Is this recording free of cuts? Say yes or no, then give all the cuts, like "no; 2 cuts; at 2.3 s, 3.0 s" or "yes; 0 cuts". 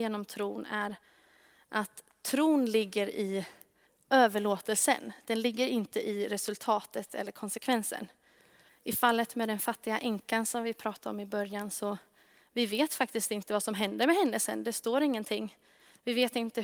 no; 1 cut; at 8.7 s